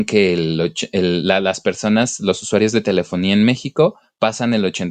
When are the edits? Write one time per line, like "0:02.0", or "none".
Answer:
none